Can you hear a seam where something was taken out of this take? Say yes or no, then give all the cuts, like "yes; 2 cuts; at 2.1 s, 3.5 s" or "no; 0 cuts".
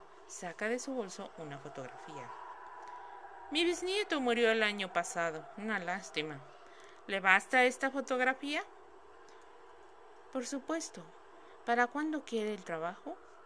no; 0 cuts